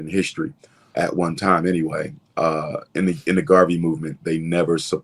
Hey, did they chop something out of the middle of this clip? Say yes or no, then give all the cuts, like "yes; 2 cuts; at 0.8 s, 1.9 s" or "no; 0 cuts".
yes; 1 cut; at 0.9 s